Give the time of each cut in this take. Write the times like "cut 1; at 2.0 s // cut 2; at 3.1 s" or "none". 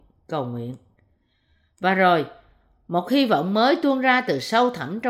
none